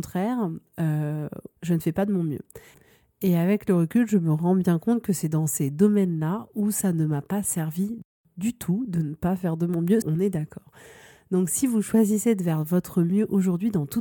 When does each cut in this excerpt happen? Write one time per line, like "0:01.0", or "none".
0:01.6
0:10.0